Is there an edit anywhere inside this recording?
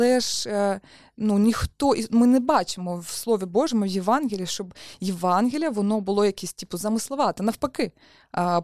no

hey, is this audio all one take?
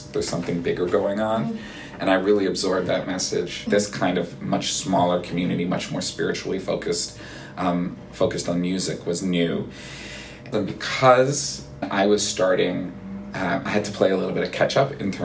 no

